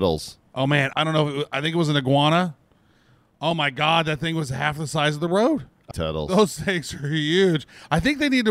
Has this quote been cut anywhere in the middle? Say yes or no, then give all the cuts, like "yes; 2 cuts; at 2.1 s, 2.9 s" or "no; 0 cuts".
yes; 2 cuts; at 0.9 s, 5.9 s